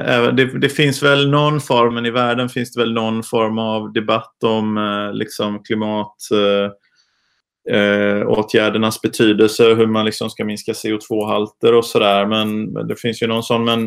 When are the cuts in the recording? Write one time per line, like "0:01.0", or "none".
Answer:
0:01.9

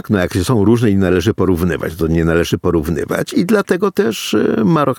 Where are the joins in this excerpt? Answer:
none

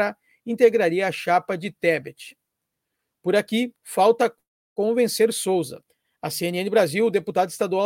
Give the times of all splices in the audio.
0:03.8

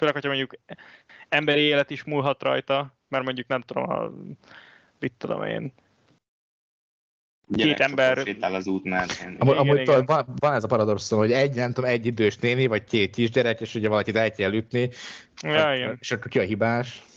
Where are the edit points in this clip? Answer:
none

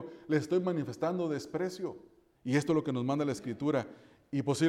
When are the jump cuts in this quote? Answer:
0:02.3

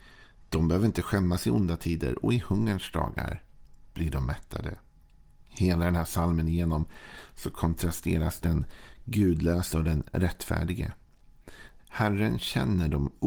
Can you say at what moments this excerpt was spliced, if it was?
0:05.5
0:11.8

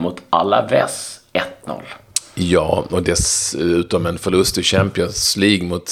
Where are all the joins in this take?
none

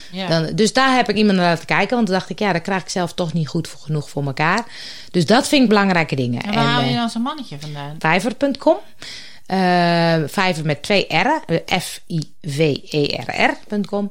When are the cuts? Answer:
0:08.0

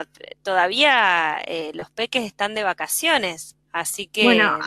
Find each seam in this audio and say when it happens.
0:03.6

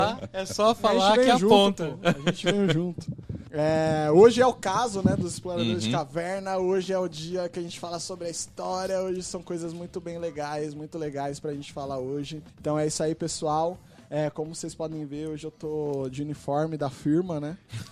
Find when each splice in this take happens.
0:03.5
0:12.5

